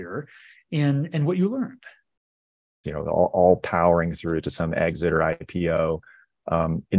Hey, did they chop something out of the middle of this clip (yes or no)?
yes